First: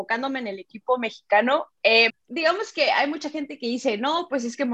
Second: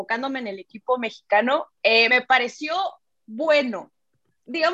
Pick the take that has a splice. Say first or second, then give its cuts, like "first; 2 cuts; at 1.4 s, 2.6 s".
first; 1 cut; at 2.1 s